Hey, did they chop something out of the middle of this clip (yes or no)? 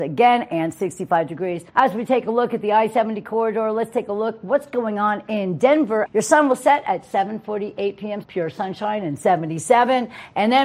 yes